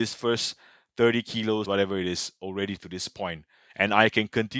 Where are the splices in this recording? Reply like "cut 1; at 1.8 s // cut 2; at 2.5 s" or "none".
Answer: cut 1; at 1.6 s